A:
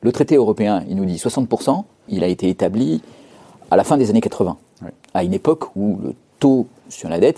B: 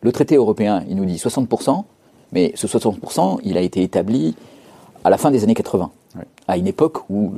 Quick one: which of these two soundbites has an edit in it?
A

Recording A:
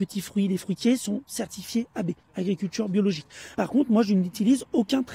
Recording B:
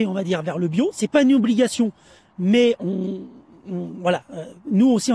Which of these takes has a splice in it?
A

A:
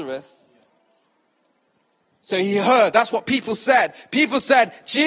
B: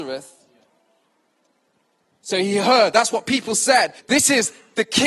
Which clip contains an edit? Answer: B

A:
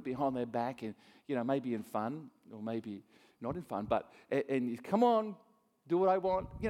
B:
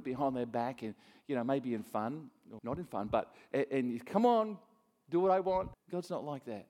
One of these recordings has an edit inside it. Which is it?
B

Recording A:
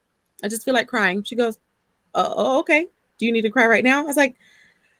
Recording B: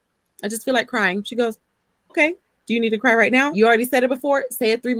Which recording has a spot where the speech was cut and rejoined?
B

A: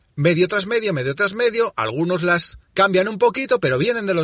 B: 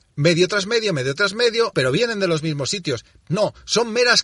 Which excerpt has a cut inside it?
B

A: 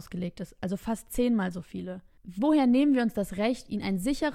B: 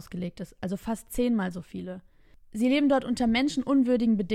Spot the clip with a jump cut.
A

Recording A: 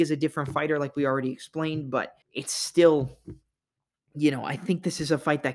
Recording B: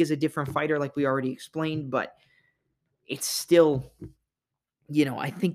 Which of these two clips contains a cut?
A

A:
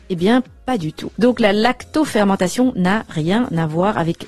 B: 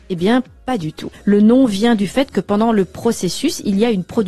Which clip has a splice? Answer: B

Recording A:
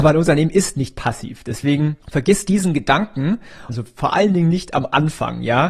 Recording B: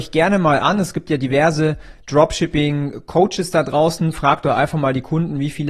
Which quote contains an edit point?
A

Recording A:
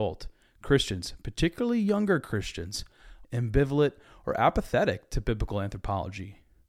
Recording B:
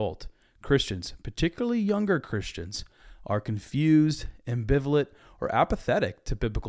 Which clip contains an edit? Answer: A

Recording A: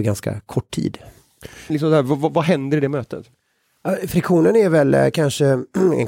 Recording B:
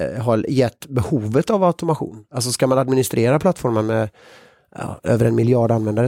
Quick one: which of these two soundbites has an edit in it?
A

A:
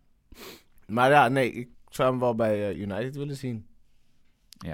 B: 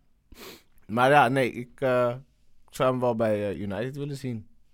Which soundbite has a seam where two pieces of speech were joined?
A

